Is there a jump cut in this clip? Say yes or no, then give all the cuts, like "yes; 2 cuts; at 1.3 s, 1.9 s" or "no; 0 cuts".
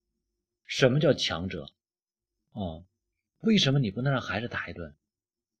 yes; 1 cut; at 2.4 s